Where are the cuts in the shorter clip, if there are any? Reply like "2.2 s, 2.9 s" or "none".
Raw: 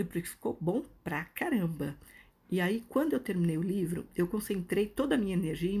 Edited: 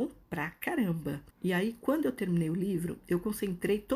1.3 s